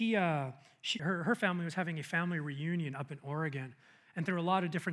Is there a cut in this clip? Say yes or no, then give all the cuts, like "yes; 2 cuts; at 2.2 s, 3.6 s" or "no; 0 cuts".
yes; 1 cut; at 1.0 s